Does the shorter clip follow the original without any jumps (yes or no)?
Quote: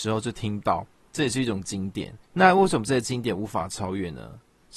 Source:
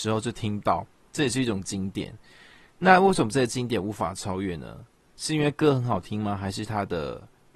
no